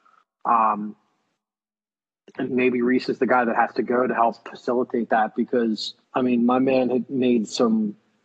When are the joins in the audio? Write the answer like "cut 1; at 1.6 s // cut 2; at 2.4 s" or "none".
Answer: cut 1; at 2.5 s // cut 2; at 6.0 s